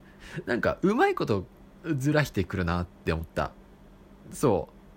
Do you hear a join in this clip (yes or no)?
no